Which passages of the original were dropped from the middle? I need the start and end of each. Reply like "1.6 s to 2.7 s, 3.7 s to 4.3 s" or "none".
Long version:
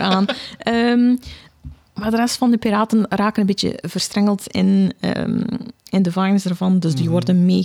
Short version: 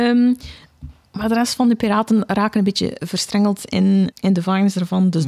4.9 s to 5.8 s